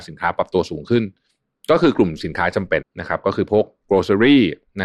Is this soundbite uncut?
no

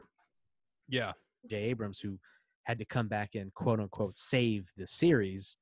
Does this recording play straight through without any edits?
no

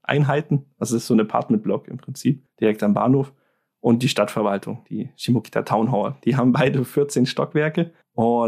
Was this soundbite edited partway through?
no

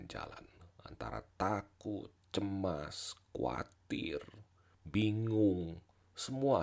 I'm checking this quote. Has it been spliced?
no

